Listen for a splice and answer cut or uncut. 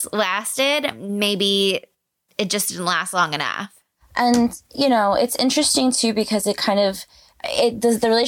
uncut